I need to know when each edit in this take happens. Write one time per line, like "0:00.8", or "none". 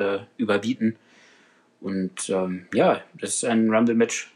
none